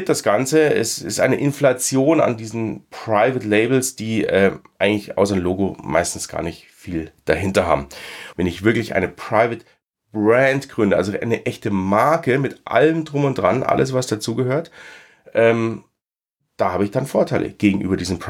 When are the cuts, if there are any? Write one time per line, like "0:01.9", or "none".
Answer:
0:08.3